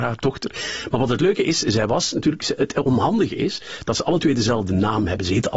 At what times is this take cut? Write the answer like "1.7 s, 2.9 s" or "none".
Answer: none